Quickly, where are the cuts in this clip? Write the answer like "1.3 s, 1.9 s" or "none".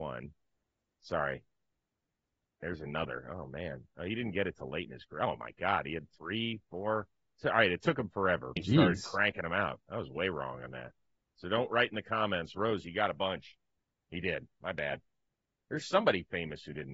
8.6 s